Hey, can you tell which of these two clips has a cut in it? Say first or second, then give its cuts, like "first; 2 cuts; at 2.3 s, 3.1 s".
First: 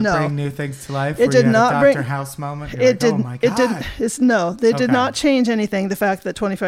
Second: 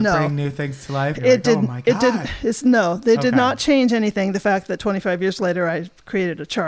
second; 1 cut; at 1.1 s